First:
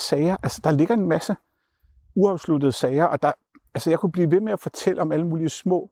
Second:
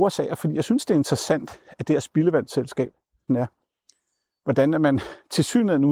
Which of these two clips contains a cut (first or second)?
second